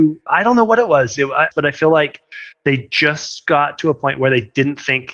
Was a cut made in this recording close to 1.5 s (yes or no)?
yes